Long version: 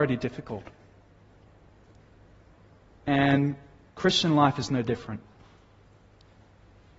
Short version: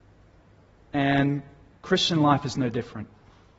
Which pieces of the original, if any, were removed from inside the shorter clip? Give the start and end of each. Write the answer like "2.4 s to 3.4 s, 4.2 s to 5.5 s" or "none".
none